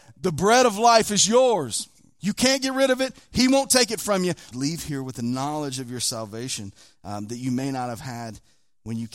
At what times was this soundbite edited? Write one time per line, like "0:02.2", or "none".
0:02.2
0:04.5